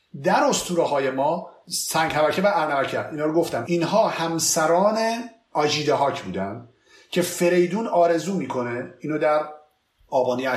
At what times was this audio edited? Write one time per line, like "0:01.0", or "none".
none